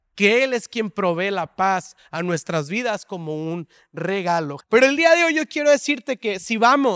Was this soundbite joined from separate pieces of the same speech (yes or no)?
yes